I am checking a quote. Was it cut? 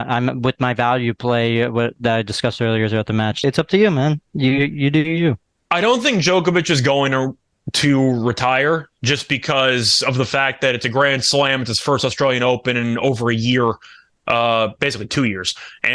yes; 1 cut; at 3.4 s

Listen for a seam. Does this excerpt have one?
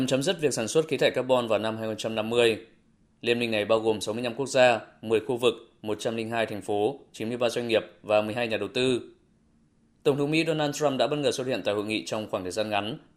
no; 0 cuts

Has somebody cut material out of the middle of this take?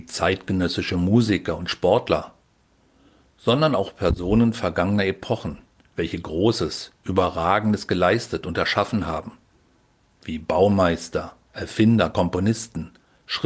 no; 0 cuts

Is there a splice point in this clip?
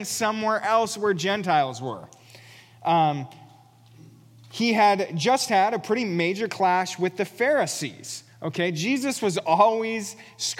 no; 0 cuts

